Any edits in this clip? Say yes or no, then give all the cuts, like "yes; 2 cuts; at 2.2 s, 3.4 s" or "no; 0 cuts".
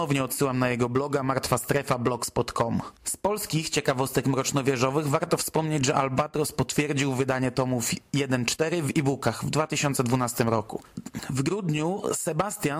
yes; 1 cut; at 3.0 s